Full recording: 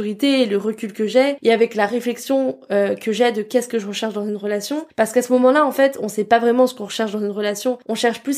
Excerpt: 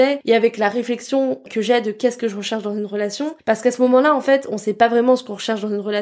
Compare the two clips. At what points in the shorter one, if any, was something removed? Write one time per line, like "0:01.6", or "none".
0:01.5